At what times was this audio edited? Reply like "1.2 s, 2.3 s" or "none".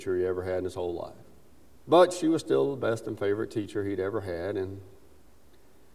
1.8 s